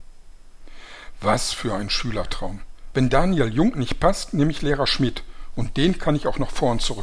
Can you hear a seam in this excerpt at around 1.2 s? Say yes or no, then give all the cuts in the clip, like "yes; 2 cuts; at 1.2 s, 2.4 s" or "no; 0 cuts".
no; 1 cut; at 2.9 s